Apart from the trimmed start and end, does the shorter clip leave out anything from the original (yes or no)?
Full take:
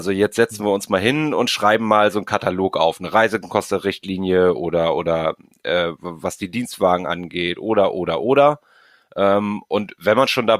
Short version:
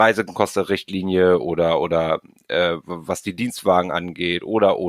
no